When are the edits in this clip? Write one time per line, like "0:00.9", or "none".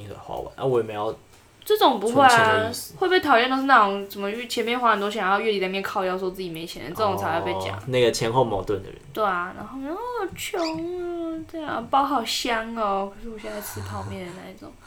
none